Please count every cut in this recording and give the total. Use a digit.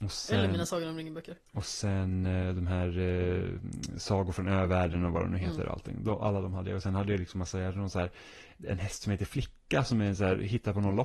0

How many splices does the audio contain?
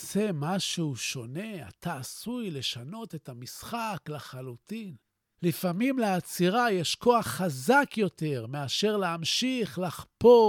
1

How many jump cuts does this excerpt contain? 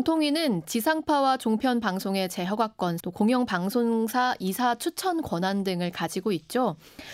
1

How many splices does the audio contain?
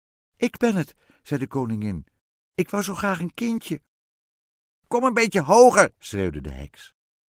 1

